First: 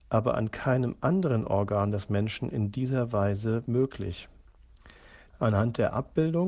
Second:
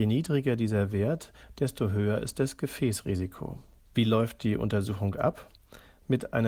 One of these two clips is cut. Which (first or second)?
first